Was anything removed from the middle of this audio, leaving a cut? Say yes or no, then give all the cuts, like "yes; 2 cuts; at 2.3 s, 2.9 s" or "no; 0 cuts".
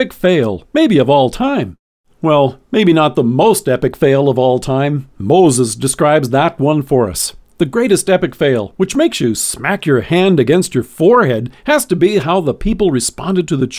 no; 0 cuts